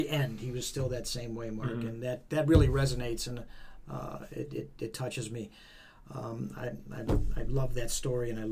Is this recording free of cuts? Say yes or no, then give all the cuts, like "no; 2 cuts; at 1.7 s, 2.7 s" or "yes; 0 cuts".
yes; 0 cuts